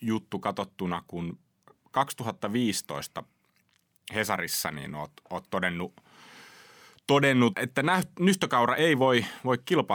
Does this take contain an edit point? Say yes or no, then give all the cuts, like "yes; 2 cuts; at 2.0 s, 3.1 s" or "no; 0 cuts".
yes; 1 cut; at 7.5 s